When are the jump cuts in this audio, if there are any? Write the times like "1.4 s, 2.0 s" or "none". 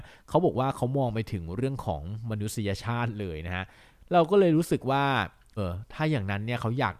5.6 s